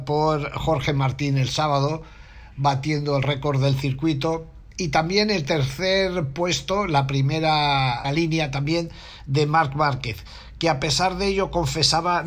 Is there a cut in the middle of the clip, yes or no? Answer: yes